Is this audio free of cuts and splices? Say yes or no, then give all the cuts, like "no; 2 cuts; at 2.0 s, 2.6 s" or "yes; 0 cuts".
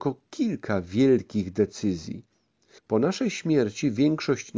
no; 1 cut; at 2.8 s